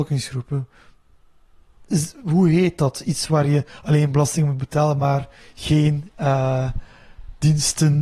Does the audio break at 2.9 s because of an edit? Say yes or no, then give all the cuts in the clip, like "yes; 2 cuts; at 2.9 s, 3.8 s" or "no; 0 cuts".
no; 0 cuts